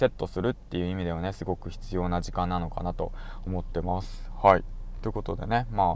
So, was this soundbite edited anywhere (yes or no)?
no